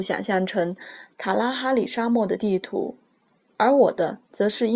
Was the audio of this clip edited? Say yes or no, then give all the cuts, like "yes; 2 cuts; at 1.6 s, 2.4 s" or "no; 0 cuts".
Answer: no; 0 cuts